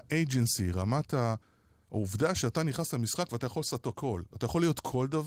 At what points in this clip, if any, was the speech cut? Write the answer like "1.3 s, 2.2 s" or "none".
none

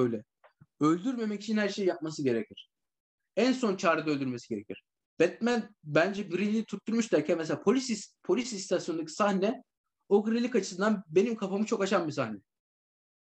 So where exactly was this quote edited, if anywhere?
5.1 s

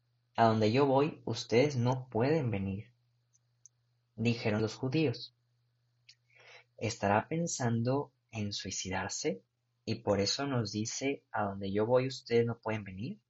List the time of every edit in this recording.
4.6 s

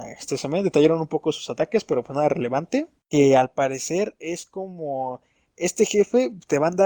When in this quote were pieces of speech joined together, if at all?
3.0 s

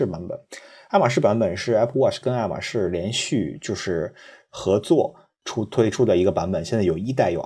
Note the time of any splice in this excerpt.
none

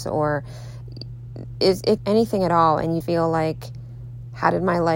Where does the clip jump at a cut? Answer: 2.0 s, 3.0 s

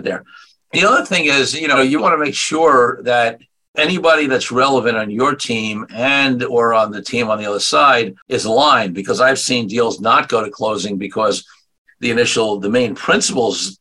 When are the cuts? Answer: 2.0 s, 8.2 s

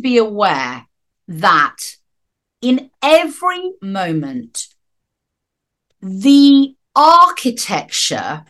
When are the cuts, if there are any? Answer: 3.8 s, 6.8 s

